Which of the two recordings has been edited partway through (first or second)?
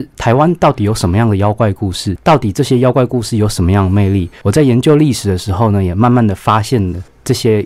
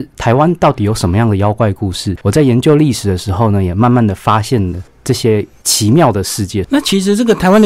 second